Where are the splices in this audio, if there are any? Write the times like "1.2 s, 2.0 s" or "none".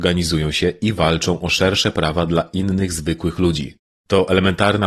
none